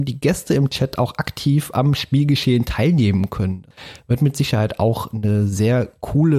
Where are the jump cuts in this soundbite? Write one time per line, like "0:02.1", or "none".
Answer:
none